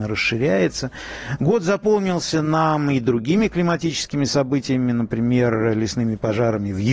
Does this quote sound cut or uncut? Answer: uncut